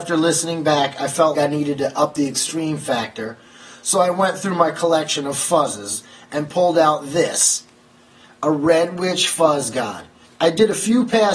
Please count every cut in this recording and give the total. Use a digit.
2